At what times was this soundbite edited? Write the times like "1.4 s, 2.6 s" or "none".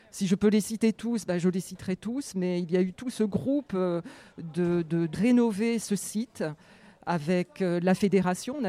2.9 s, 5.1 s, 6.9 s